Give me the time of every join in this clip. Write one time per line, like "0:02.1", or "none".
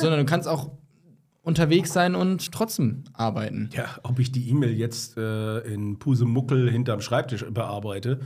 0:02.5